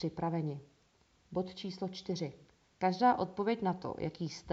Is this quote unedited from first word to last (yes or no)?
no